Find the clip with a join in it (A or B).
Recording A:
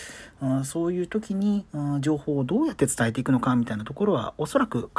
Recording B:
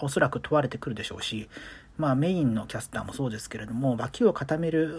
A